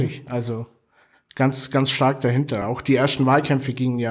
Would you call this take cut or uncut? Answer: uncut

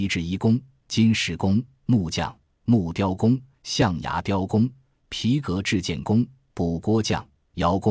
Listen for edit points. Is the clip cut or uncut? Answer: uncut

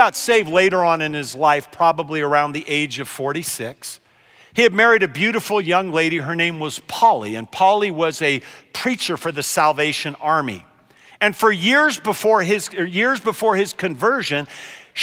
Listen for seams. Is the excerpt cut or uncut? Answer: uncut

